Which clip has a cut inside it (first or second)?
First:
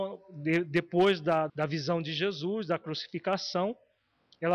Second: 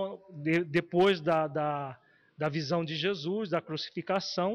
first